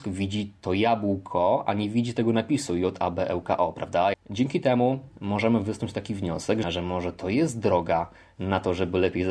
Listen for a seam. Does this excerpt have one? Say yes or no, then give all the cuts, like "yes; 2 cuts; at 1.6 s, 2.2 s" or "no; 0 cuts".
yes; 2 cuts; at 4.1 s, 6.6 s